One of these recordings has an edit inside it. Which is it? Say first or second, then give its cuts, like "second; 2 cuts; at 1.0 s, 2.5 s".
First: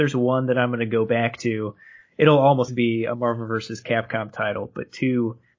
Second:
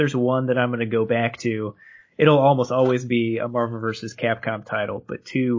first; 1 cut; at 2.7 s